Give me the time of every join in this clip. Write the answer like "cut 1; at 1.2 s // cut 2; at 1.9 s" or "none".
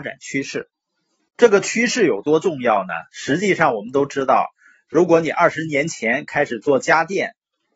none